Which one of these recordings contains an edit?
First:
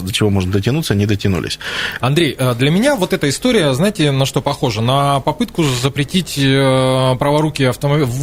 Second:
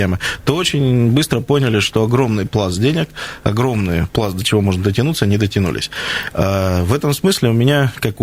first; 1 cut; at 2.0 s

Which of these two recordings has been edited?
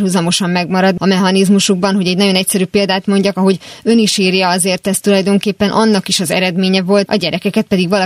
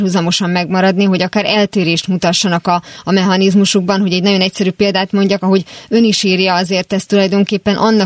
first; 2 cuts; at 1.0 s, 7.1 s

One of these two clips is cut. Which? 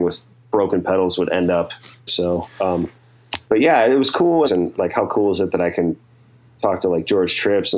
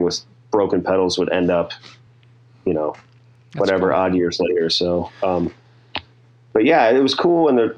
first; 3 cuts; at 2.1 s, 3.4 s, 4.4 s

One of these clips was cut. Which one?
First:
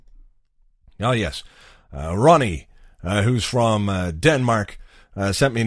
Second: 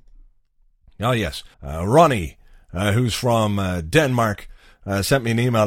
second; 1 cut; at 1.5 s

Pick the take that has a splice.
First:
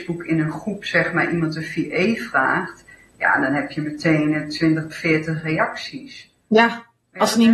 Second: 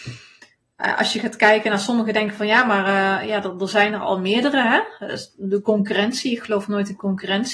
first; 1 cut; at 4.9 s

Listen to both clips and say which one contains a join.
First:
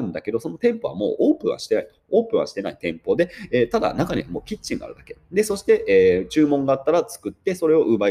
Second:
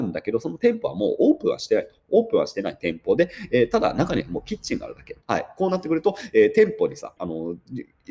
second; 2 cuts; at 5.2 s, 7.2 s

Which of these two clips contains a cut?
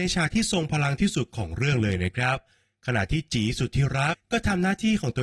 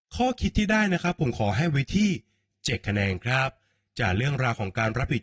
first; 1 cut; at 4.1 s

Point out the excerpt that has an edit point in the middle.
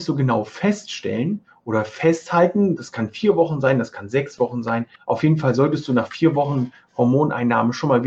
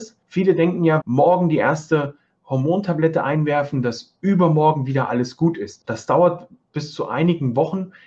second; 2 cuts; at 1.0 s, 5.8 s

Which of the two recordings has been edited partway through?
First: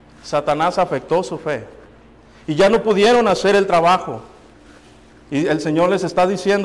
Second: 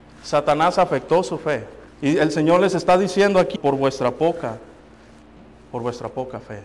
second; 2 cuts; at 1.9 s, 3.6 s

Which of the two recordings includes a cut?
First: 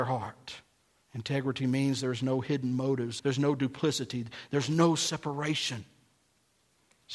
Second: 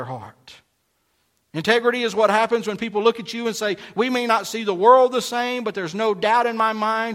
first; 2 cuts; at 1.0 s, 3.2 s

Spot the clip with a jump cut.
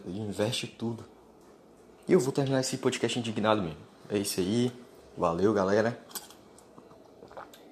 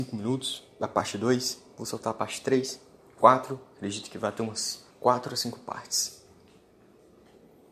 second; 1 cut; at 4.9 s

